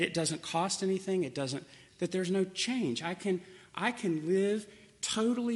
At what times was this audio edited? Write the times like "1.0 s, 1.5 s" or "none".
1.9 s